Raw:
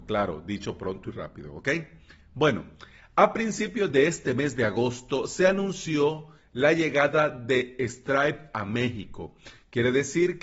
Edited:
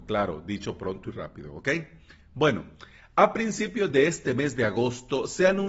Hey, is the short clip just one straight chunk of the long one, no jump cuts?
yes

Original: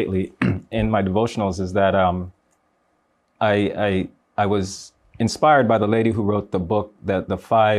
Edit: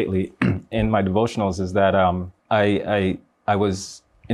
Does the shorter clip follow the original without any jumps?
no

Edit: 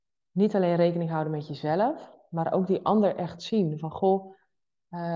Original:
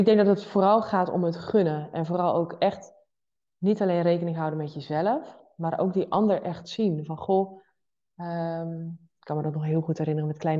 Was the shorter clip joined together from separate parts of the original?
no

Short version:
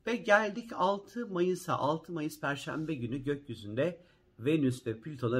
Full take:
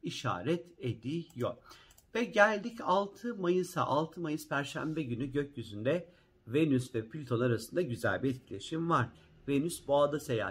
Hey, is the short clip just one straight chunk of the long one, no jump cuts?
yes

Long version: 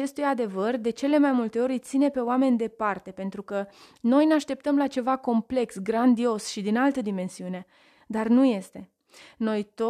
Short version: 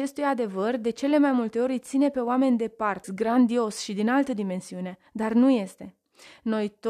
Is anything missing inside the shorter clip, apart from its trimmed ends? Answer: yes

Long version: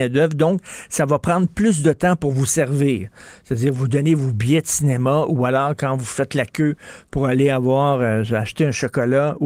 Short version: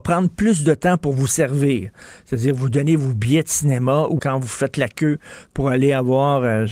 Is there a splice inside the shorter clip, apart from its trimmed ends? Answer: yes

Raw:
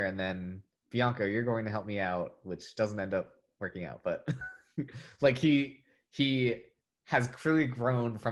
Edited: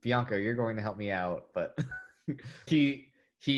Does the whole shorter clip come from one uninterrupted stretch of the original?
no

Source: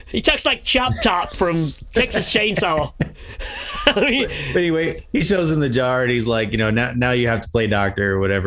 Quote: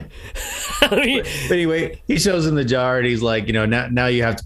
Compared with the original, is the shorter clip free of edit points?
yes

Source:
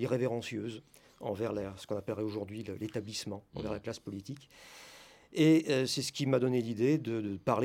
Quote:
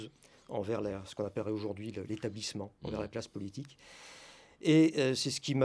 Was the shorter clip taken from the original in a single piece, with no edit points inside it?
yes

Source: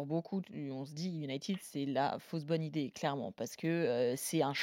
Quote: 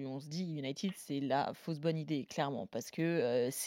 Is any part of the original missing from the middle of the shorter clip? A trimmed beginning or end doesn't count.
no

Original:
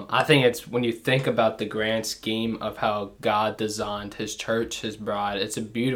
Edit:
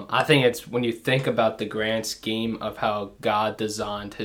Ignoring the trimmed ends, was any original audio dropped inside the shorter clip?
no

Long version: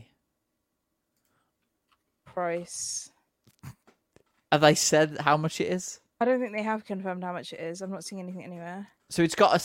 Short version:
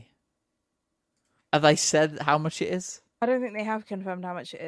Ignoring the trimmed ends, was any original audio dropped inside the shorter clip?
yes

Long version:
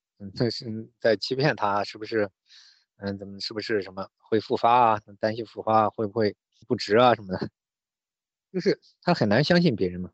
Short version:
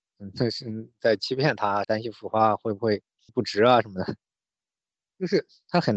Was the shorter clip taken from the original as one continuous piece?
no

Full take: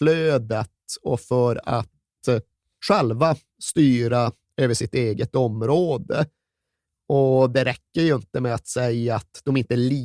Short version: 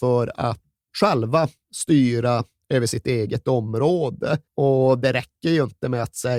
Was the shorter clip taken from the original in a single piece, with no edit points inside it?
no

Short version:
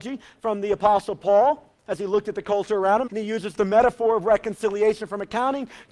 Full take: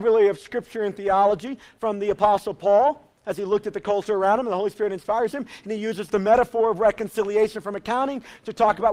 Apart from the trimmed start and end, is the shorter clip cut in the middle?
yes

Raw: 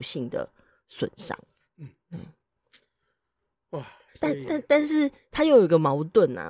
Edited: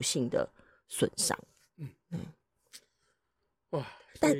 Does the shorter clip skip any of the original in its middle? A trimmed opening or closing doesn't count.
no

